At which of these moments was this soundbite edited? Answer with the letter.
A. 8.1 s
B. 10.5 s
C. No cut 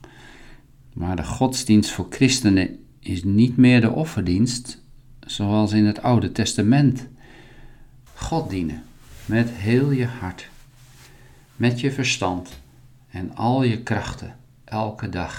A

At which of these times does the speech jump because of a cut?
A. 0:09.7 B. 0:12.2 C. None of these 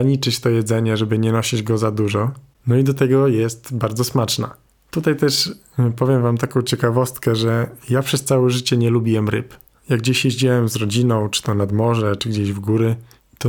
B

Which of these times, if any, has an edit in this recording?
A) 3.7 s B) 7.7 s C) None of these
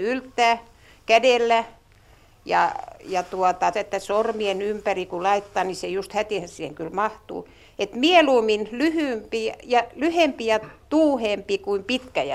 A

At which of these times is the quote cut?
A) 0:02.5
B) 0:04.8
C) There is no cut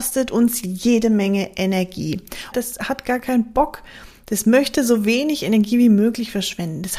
A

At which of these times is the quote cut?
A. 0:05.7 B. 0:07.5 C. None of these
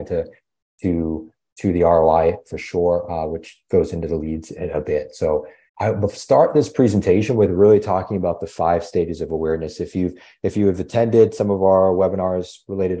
A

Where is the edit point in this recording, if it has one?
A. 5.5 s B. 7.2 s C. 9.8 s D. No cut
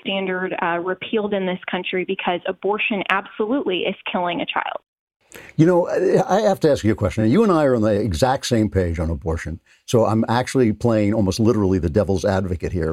D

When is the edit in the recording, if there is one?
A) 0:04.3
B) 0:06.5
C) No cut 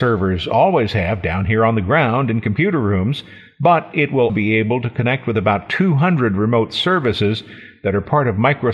A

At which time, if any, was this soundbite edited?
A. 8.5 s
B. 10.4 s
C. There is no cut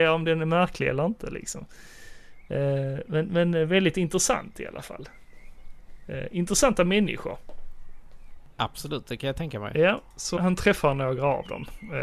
B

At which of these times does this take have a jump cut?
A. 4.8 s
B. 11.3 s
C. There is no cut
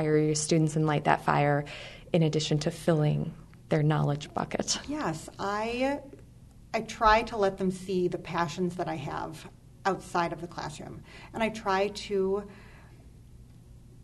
C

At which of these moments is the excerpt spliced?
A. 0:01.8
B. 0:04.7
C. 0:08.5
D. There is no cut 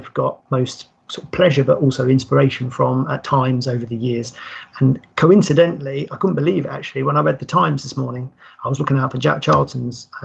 D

